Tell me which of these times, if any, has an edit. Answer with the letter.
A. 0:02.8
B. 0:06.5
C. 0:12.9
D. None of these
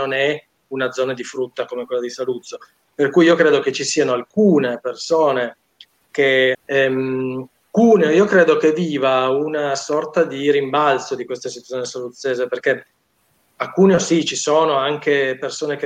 B